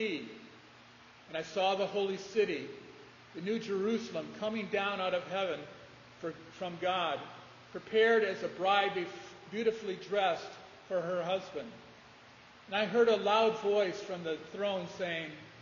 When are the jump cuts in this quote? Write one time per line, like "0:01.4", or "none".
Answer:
none